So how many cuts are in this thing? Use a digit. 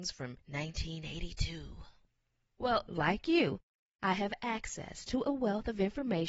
0